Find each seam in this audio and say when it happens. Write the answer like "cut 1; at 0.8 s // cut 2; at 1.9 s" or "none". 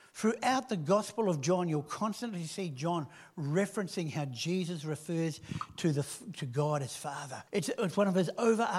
cut 1; at 7.5 s